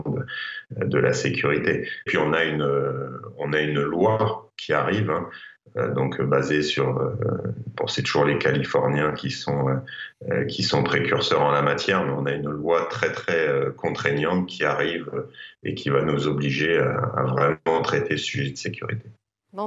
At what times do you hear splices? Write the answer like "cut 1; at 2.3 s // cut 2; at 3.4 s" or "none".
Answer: cut 1; at 2.1 s

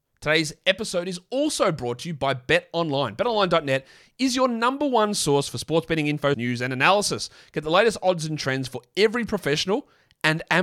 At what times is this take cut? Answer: cut 1; at 6.3 s

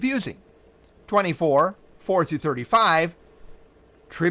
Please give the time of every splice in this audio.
cut 1; at 1.0 s

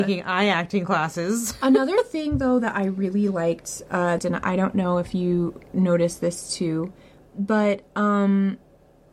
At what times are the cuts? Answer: cut 1; at 4.2 s

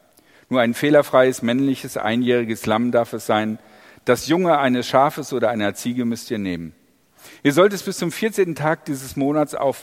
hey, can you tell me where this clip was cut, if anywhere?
none

